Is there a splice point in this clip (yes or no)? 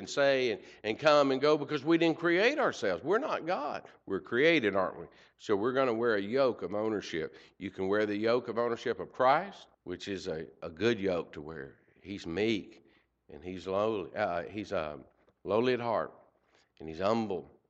yes